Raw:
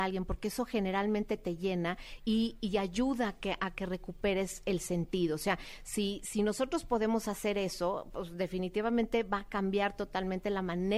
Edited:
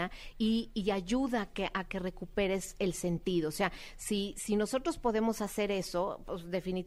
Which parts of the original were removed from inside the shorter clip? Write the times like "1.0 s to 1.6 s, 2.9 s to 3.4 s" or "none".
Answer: none